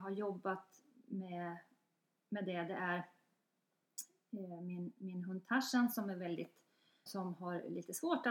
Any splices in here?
yes; 1 cut; at 7.1 s

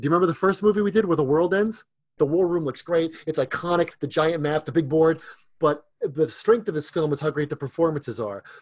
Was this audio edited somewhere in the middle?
yes; 2 cuts; at 2.2 s, 3.9 s

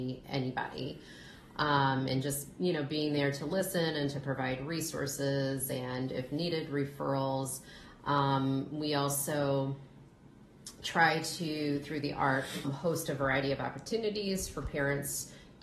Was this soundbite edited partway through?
yes; 1 cut; at 12.6 s

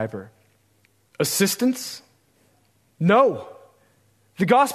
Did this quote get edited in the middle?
yes; 1 cut; at 1.1 s

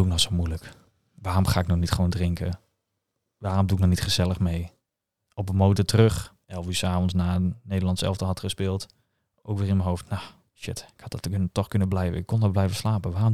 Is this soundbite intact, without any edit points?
no; 2 cuts; at 5.3 s, 6.4 s

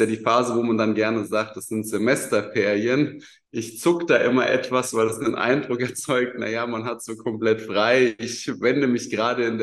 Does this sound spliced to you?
no; 0 cuts

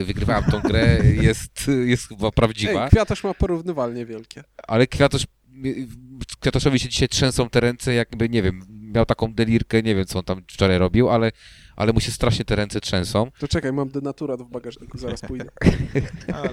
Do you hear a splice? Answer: no; 0 cuts

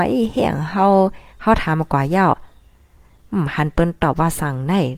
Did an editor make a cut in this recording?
yes; 1 cut; at 1.3 s

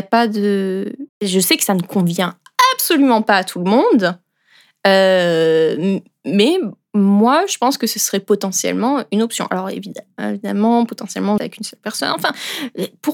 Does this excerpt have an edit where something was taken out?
yes; 2 cuts; at 1.1 s, 11.4 s

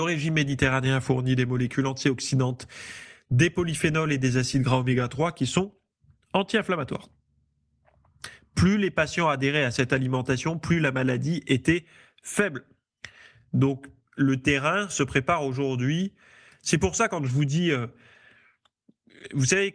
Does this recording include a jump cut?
no; 0 cuts

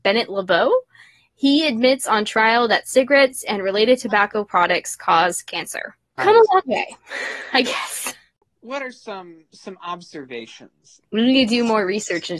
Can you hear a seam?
yes; 2 cuts; at 6.2 s, 11.0 s

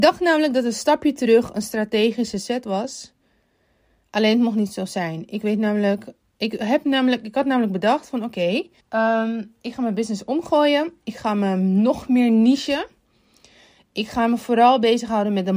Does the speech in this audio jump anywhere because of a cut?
yes; 1 cut; at 8.8 s

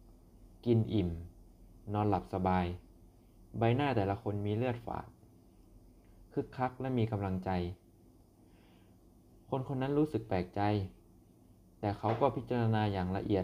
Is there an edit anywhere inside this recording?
no; 0 cuts

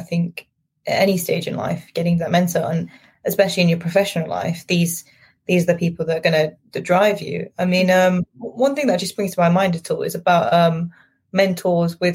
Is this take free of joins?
yes; 0 cuts

